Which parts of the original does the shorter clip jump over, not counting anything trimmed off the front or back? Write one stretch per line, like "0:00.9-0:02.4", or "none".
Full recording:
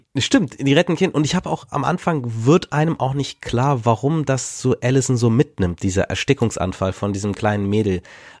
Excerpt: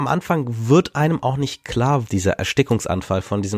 0:03.8-0:05.8